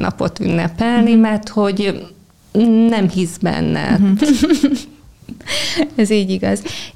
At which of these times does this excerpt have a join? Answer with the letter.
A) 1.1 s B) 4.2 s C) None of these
B